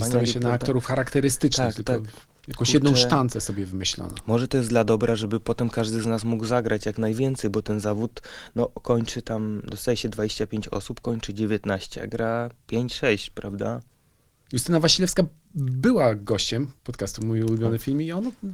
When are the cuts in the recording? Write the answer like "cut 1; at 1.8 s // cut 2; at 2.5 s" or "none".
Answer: cut 1; at 12.6 s // cut 2; at 14.5 s